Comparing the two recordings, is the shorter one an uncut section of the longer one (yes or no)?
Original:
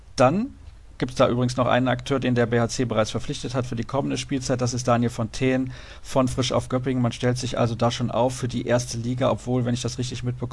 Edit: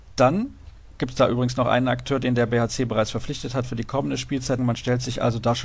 no